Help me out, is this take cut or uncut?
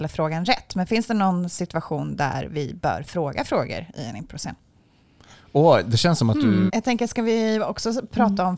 cut